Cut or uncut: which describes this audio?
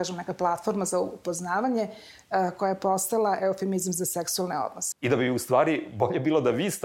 cut